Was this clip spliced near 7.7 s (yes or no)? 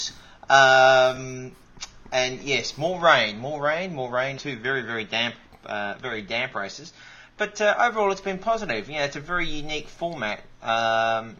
no